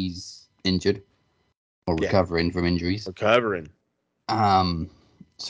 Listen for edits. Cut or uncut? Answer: uncut